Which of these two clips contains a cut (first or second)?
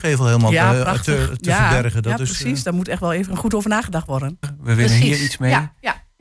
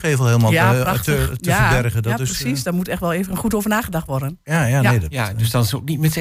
first